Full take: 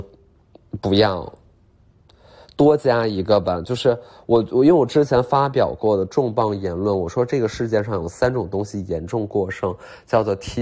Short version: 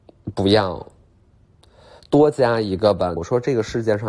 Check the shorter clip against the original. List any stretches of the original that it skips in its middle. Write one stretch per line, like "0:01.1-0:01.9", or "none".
0:03.6-0:07.0